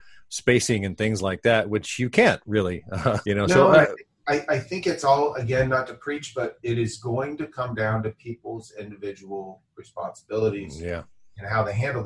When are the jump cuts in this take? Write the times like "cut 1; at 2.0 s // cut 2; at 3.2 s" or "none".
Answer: cut 1; at 3.2 s

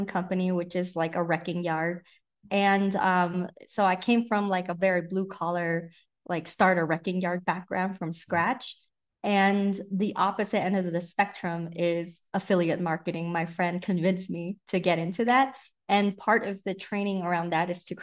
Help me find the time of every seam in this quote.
none

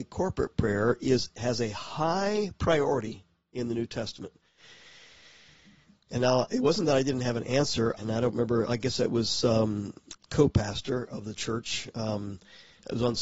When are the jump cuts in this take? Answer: cut 1; at 6.1 s // cut 2; at 8.0 s // cut 3; at 10.1 s

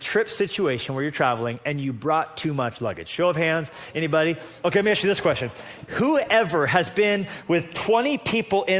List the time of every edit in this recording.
none

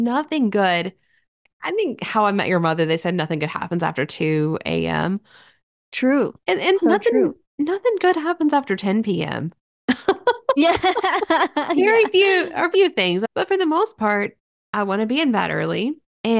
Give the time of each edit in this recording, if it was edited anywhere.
cut 1; at 6.7 s // cut 2; at 12.7 s

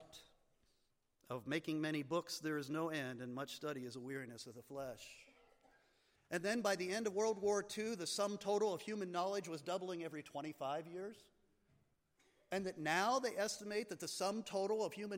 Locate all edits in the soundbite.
cut 1; at 6.1 s

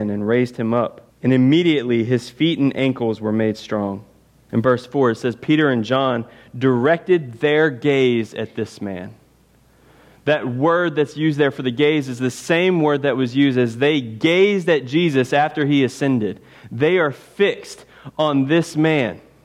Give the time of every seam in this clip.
cut 1; at 1.1 s // cut 2; at 4.5 s

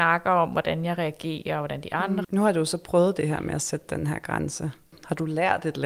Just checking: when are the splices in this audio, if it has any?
cut 1; at 2.2 s

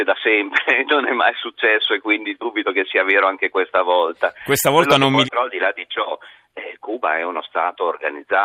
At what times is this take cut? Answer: cut 1; at 5.2 s

